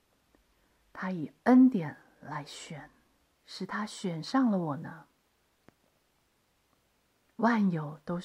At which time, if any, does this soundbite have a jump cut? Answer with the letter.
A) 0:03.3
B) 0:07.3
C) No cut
A